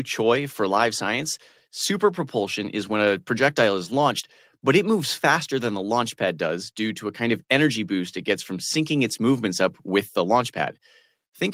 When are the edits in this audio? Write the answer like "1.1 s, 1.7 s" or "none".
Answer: none